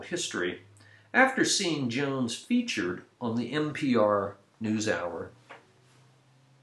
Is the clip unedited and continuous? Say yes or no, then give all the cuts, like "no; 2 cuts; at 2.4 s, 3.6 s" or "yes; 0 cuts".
yes; 0 cuts